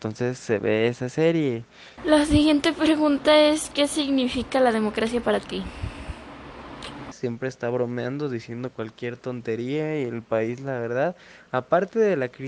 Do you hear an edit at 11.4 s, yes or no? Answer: no